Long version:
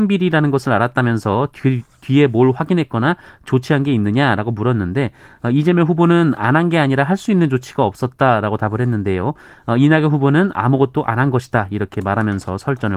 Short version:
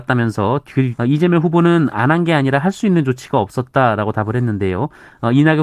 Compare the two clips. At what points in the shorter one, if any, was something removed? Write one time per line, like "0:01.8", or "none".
0:01.0